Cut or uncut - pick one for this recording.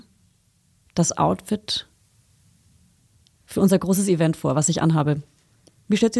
uncut